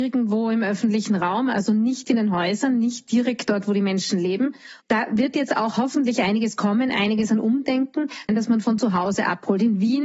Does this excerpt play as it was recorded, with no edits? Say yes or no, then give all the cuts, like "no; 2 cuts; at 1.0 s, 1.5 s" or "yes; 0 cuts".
no; 2 cuts; at 4.8 s, 8.3 s